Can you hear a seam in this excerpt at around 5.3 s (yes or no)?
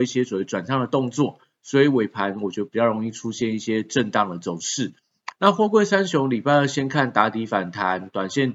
yes